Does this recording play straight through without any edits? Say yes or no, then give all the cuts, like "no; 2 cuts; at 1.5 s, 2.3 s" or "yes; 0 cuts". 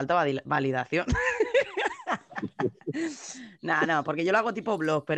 yes; 0 cuts